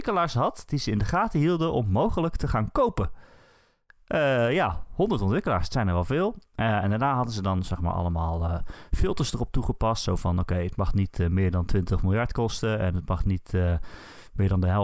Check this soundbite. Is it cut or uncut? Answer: uncut